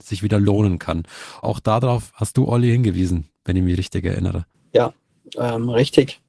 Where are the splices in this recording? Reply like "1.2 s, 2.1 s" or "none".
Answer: 1.4 s